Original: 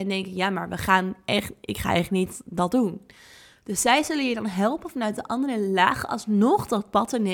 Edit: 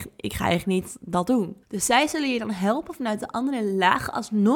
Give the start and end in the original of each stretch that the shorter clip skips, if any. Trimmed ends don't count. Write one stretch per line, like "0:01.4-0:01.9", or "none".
0:03.1-0:03.6